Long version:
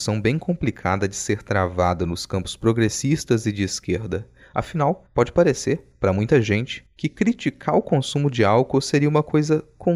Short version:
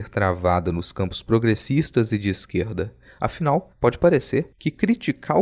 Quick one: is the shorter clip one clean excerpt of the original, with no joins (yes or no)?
no